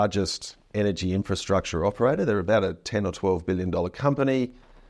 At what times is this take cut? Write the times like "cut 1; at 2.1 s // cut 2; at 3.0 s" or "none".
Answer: none